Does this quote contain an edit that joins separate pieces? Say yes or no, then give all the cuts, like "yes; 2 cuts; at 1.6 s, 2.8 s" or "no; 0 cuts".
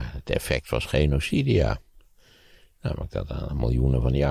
no; 0 cuts